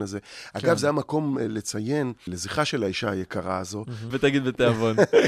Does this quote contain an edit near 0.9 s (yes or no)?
no